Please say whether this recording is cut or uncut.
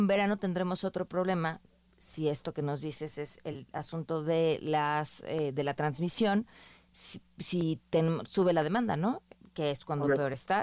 uncut